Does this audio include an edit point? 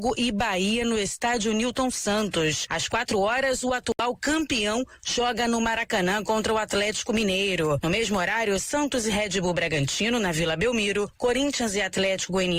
yes; 1 cut; at 5.0 s

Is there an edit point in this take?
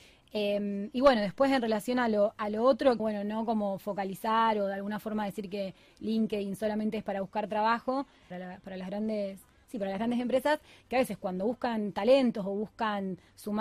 yes; 2 cuts; at 3.0 s, 8.3 s

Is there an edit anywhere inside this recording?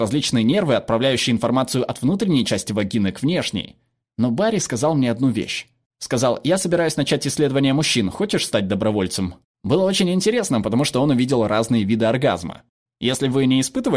yes; 2 cuts; at 4.0 s, 9.5 s

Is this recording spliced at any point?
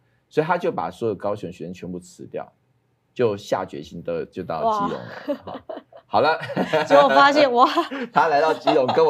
no; 0 cuts

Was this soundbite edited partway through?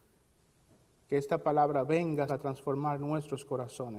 yes; 1 cut; at 2.3 s

